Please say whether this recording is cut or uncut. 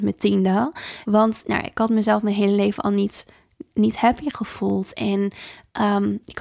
cut